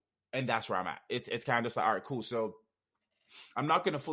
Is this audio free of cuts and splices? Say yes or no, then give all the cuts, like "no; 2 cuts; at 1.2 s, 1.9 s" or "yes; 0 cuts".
yes; 0 cuts